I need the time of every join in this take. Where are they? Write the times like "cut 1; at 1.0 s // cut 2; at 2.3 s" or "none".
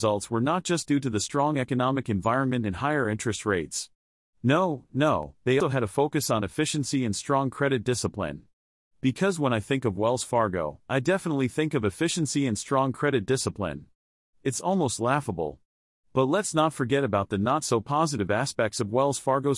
cut 1; at 5.6 s